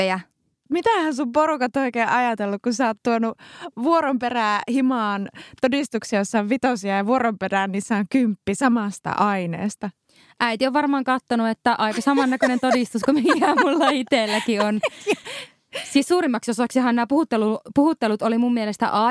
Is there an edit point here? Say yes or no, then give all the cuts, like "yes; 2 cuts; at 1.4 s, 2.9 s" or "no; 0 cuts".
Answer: no; 0 cuts